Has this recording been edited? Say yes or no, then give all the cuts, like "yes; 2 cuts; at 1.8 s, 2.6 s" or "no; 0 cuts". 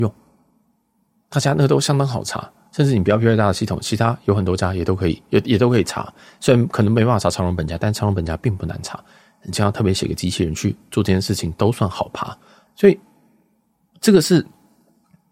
yes; 1 cut; at 12.7 s